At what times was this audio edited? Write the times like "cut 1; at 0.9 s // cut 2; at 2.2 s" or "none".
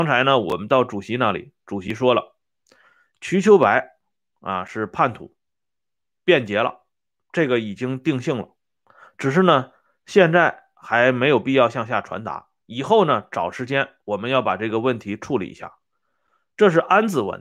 none